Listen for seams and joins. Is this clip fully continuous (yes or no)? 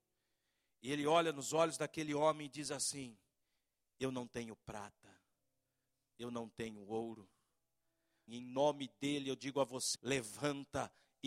no